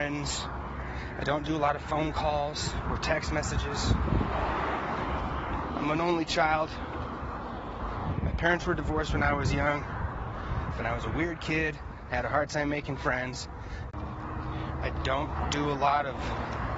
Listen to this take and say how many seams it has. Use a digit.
2